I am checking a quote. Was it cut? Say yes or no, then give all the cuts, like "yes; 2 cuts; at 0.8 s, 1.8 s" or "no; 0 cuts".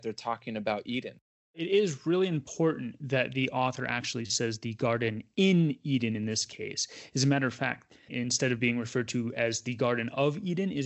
yes; 1 cut; at 8.1 s